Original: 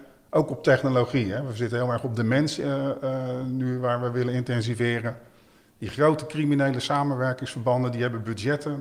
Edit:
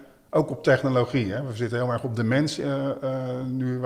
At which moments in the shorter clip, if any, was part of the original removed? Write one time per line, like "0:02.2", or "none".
none